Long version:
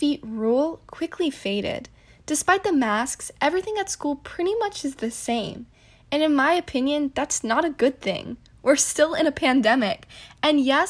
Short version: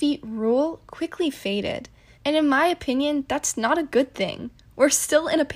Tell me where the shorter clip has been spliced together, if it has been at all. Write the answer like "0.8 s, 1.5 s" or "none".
2.2 s